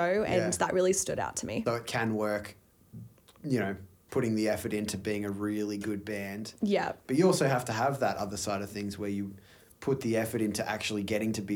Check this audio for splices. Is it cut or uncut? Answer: cut